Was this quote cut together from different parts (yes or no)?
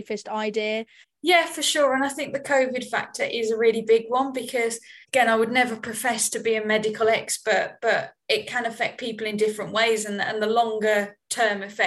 yes